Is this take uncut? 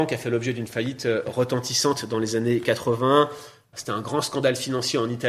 yes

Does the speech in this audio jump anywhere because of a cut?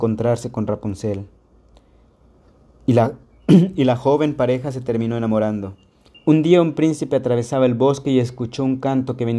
yes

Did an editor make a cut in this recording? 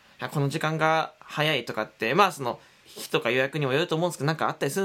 yes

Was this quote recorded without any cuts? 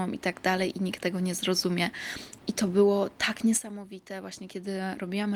no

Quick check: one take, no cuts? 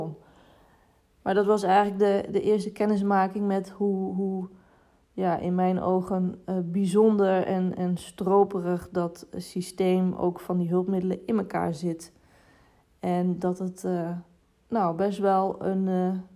yes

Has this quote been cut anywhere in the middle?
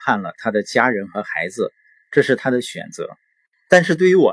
no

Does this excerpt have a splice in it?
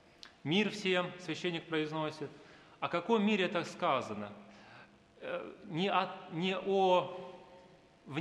no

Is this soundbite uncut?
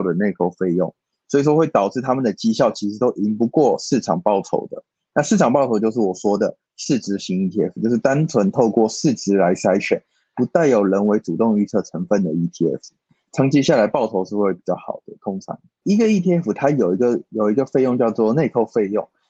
no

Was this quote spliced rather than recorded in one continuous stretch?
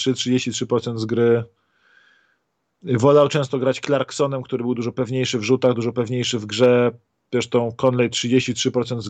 yes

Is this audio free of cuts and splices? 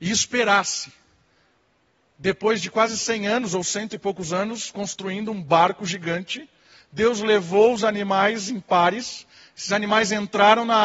yes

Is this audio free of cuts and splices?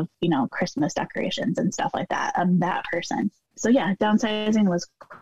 no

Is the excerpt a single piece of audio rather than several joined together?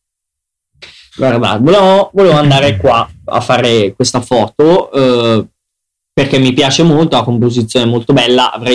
no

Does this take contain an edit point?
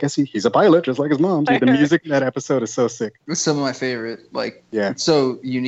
yes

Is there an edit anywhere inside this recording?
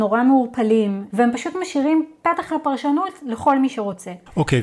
yes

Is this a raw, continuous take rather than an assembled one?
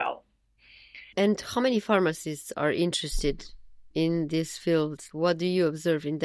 yes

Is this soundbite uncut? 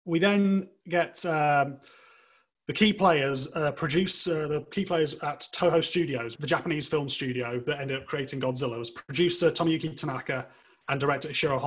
no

